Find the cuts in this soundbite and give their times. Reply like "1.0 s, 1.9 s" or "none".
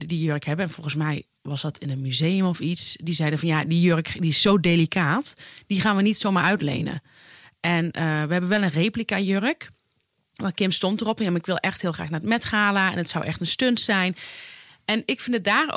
none